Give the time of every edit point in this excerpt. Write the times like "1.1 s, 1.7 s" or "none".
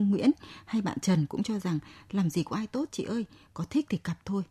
1.0 s